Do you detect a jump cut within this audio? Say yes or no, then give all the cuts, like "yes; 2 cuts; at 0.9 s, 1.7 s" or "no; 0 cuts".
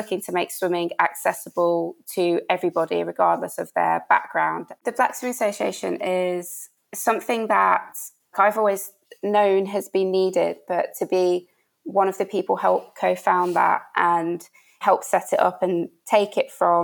yes; 2 cuts; at 4.8 s, 8.3 s